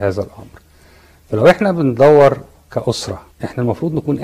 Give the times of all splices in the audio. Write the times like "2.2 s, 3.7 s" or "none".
3.3 s